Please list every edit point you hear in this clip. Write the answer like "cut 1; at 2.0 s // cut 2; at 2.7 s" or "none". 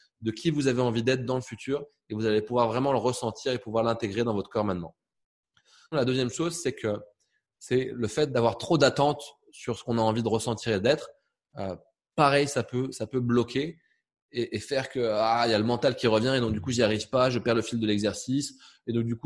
cut 1; at 5.9 s